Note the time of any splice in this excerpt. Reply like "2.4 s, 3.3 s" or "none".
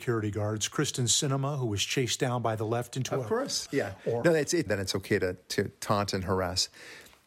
3.7 s, 4.7 s